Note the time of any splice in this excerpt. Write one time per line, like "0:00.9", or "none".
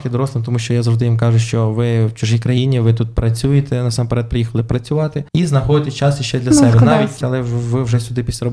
0:05.3
0:07.2